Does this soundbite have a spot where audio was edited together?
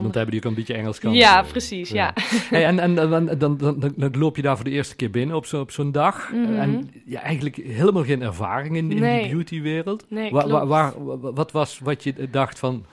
no; 0 cuts

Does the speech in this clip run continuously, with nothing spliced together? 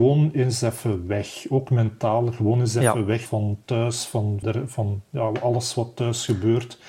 no; 2 cuts; at 3.3 s, 4.4 s

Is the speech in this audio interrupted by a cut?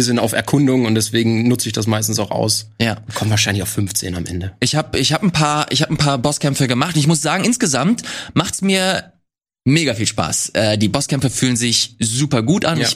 no; 0 cuts

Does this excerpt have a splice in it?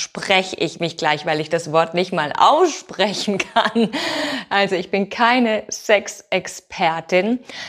no; 0 cuts

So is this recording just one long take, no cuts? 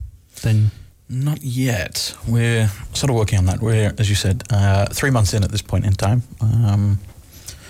yes; 0 cuts

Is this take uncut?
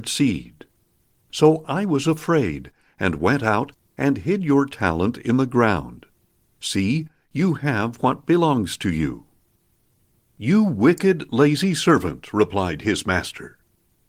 yes; 0 cuts

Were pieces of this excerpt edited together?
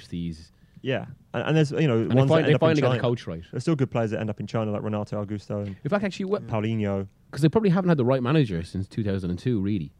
no; 0 cuts

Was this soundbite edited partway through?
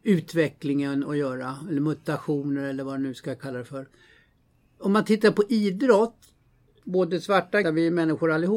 yes; 1 cut; at 7.6 s

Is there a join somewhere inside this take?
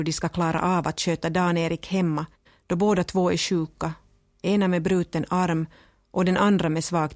no; 0 cuts

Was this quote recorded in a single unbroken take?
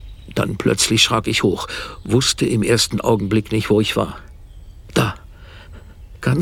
yes; 0 cuts

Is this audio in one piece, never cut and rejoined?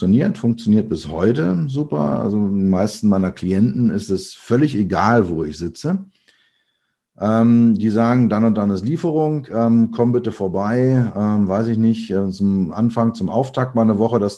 yes; 0 cuts

